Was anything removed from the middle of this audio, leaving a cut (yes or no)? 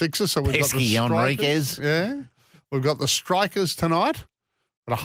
no